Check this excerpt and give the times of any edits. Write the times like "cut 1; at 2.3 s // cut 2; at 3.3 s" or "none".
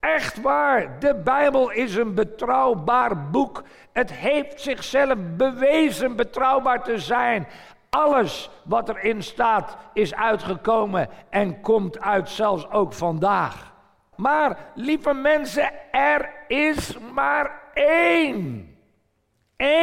cut 1; at 14.1 s